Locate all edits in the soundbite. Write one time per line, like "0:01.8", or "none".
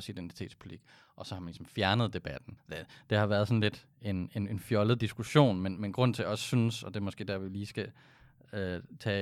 0:02.6